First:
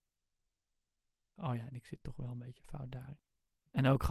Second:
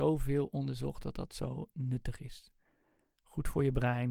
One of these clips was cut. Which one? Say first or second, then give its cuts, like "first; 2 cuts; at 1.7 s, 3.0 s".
first; 1 cut; at 1.4 s